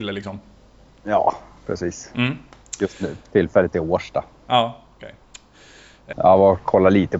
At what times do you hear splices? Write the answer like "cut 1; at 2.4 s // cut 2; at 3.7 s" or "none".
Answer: cut 1; at 6.1 s